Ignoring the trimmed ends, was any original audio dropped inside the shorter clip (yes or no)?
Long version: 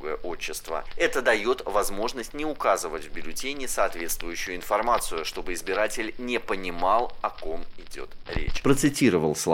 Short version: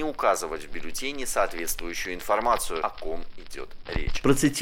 yes